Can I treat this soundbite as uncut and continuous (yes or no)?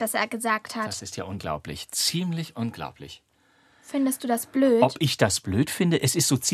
yes